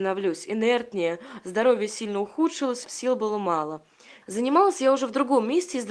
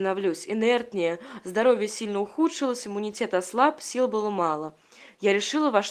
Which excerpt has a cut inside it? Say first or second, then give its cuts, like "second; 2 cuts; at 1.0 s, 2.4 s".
first; 2 cuts; at 2.8 s, 4.2 s